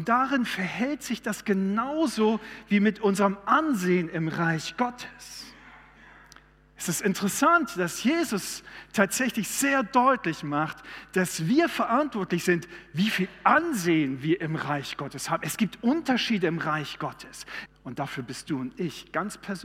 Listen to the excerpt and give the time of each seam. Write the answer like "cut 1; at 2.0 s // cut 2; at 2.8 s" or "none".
cut 1; at 17.7 s